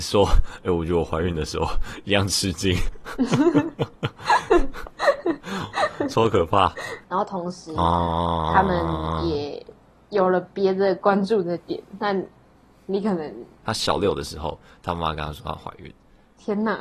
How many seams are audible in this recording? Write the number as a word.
two